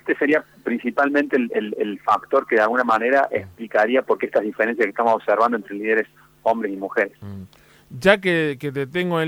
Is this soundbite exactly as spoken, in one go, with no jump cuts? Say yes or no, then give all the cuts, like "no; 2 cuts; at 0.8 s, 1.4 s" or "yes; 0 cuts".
yes; 0 cuts